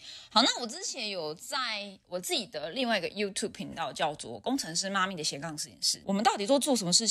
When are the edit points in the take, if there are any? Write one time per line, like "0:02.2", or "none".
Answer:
0:06.0